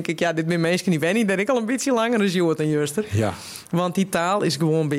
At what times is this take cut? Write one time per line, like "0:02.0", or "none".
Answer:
none